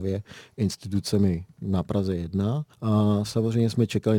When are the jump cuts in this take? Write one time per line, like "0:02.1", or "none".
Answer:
0:02.7